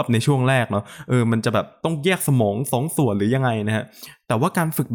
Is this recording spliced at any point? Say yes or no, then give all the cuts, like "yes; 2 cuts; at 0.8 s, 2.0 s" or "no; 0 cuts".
no; 0 cuts